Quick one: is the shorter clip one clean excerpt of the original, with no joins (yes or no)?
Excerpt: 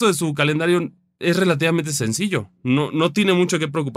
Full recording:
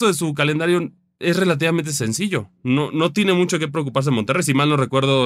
yes